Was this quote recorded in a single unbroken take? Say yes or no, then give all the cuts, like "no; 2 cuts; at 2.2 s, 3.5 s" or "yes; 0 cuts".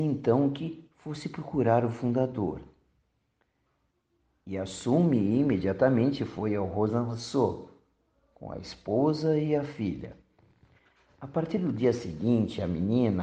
yes; 0 cuts